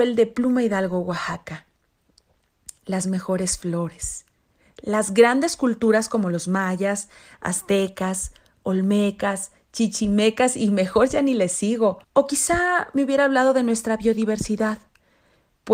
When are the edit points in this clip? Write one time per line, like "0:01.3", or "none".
0:12.0